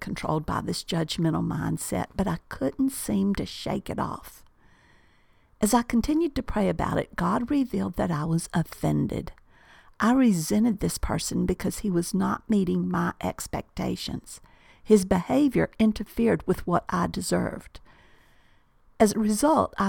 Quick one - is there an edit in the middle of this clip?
yes; 1 cut; at 14.7 s

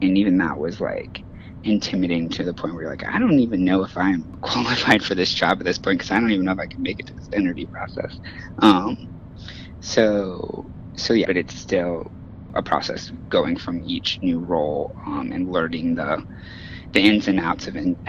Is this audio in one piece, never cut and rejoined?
no; 2 cuts; at 11.2 s, 12.5 s

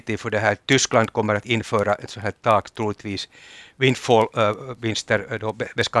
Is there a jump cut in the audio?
no; 0 cuts

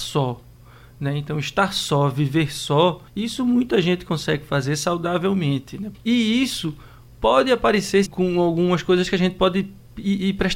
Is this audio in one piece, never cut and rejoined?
no; 3 cuts; at 3.1 s, 5.9 s, 8.0 s

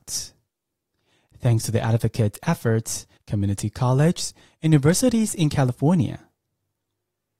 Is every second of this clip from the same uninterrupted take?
no; 1 cut; at 3.2 s

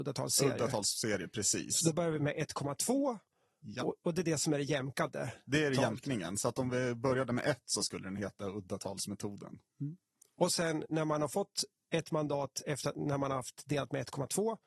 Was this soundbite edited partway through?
no; 0 cuts

